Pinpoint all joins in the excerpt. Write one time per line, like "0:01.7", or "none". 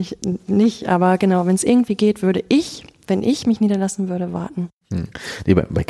none